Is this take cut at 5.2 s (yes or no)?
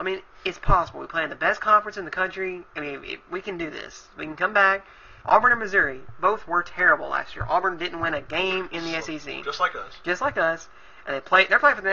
yes